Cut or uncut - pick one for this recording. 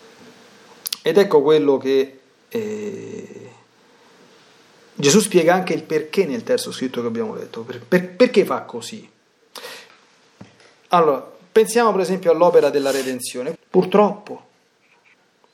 cut